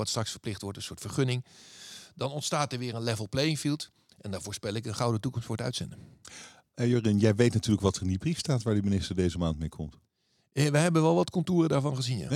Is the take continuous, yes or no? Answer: yes